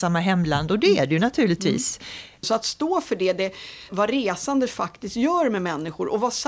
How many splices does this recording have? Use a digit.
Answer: 2